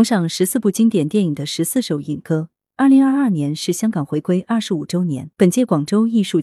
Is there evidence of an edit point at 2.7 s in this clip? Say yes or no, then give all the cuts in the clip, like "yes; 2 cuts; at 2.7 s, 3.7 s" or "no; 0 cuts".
no; 1 cut; at 5.3 s